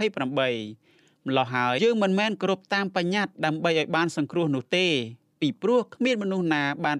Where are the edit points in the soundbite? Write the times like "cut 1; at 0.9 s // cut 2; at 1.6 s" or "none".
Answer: cut 1; at 1.8 s